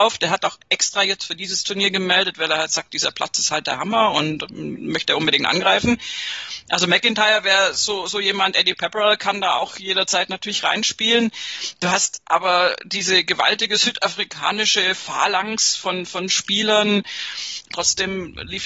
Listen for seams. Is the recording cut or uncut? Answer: cut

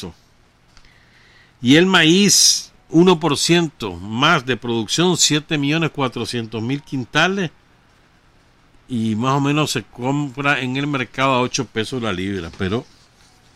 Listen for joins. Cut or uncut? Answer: uncut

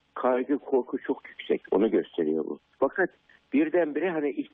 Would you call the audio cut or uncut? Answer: cut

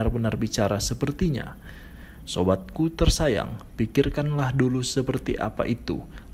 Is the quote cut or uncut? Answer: uncut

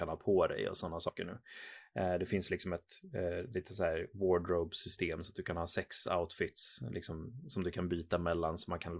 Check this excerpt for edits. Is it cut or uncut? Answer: uncut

